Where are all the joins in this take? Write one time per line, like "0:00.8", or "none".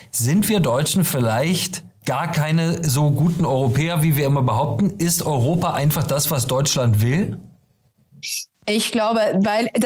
0:02.0